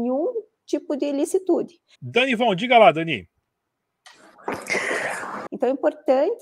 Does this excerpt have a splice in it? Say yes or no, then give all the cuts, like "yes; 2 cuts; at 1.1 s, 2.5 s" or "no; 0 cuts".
yes; 2 cuts; at 1.9 s, 5.5 s